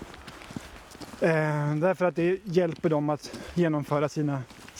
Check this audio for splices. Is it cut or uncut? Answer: uncut